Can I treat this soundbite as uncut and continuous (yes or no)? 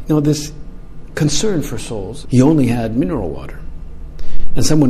no